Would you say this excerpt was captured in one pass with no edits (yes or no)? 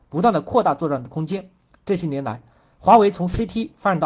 yes